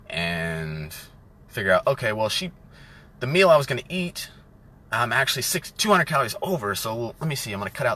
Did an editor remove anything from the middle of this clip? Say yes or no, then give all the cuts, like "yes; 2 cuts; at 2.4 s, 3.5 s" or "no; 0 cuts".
no; 0 cuts